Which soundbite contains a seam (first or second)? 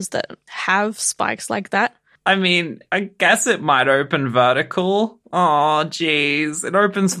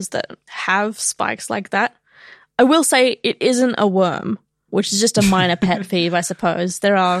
first